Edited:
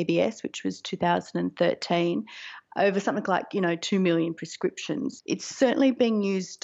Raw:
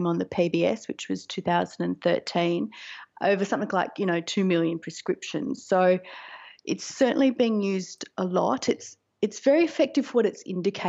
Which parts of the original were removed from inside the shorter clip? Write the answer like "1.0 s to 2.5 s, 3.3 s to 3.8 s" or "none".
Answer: 5.6 s to 6.6 s